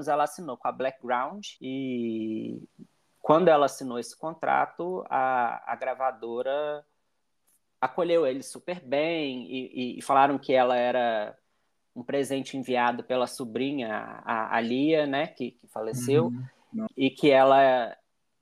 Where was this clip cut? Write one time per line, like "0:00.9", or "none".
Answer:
0:01.6
0:16.9